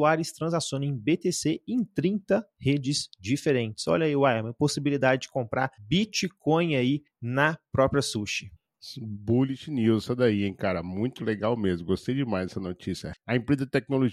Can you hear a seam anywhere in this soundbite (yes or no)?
yes